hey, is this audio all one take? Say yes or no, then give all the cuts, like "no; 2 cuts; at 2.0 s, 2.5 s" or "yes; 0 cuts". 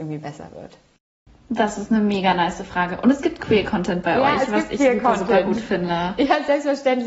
yes; 0 cuts